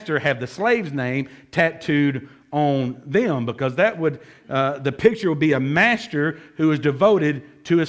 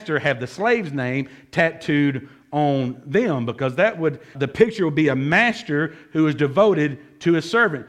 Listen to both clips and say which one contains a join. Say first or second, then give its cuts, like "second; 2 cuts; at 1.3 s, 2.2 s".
second; 1 cut; at 4.3 s